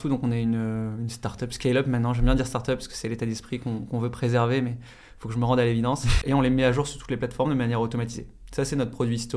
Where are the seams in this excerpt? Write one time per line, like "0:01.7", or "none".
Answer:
0:06.2